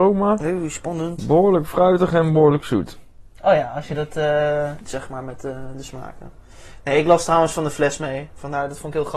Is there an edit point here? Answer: yes; 1 cut; at 4.9 s

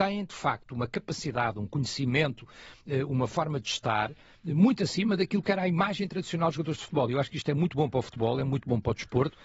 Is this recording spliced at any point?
no; 0 cuts

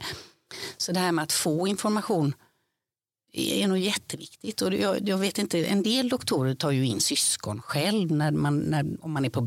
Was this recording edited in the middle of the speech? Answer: no; 0 cuts

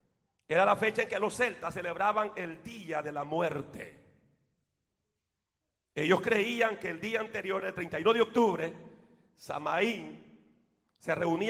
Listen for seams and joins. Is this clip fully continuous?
yes; 0 cuts

